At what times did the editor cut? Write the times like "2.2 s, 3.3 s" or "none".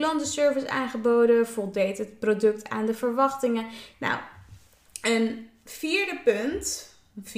3.9 s

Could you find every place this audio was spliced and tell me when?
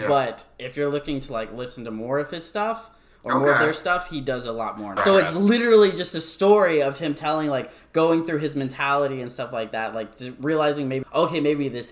5.0 s, 11.0 s

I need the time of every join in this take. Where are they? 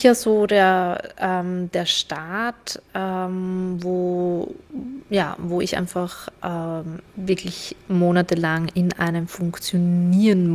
7.1 s

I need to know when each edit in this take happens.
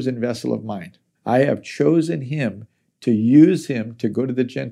1.2 s

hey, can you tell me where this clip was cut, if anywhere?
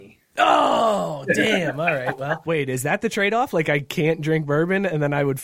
2.5 s

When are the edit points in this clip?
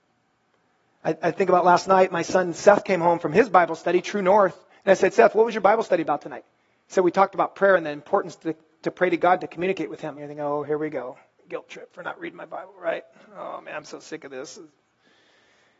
10.2 s

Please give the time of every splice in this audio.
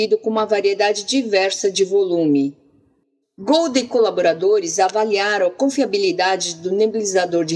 3.2 s

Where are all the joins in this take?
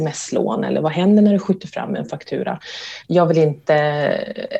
3.0 s

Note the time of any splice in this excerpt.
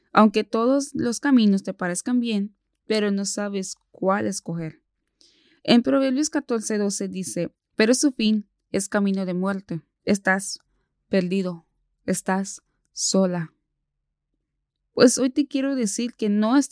7.5 s, 10.0 s

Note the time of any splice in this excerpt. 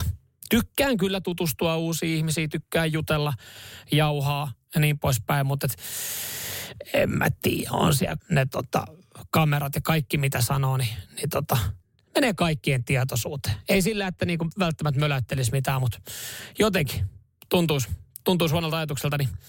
8.2 s

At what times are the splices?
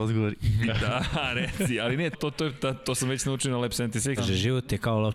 2.1 s, 4.2 s

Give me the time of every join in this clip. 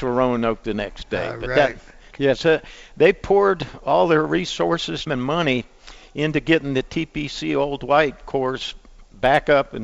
2.1 s, 5.1 s

